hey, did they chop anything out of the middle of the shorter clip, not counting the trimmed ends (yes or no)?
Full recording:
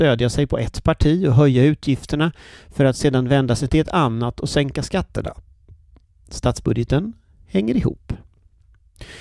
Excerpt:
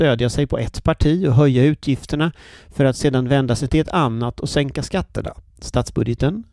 yes